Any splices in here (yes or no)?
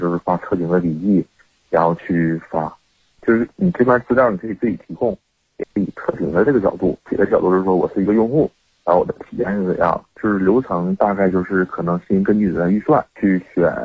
yes